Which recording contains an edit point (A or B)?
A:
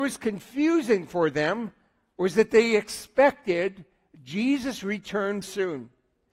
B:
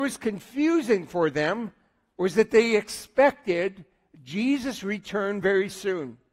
A